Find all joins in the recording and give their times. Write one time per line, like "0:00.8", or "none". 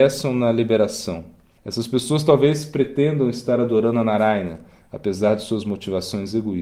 0:01.6